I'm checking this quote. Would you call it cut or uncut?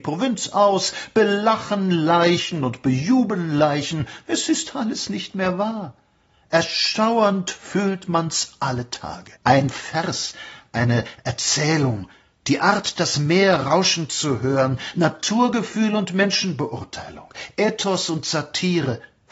cut